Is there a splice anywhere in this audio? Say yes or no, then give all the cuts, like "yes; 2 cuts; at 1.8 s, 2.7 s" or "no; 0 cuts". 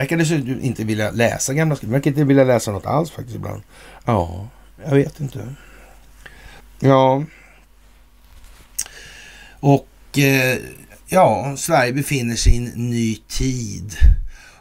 yes; 1 cut; at 6.6 s